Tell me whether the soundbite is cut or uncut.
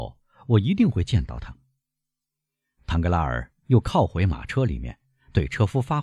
uncut